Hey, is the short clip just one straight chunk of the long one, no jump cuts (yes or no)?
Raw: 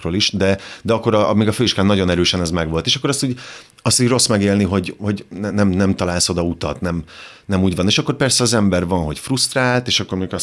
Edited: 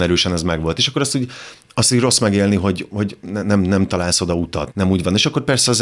no